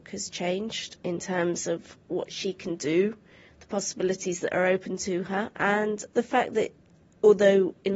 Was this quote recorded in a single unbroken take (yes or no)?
yes